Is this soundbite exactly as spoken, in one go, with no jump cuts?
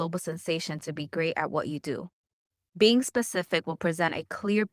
no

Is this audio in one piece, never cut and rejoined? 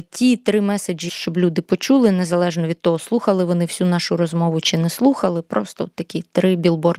no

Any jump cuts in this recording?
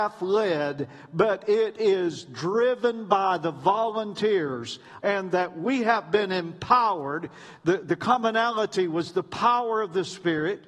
yes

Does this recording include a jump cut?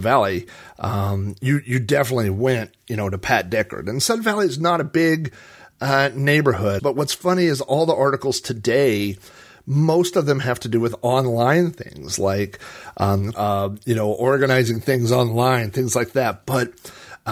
yes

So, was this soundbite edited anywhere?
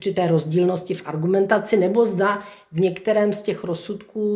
no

